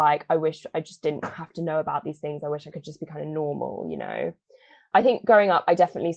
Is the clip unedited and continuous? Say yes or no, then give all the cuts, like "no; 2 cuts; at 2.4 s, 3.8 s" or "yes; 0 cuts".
no; 1 cut; at 4.9 s